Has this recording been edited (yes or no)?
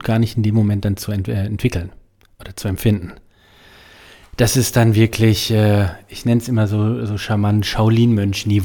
no